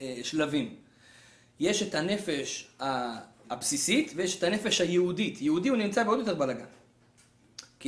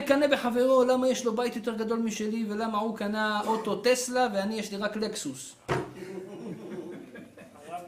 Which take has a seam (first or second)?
first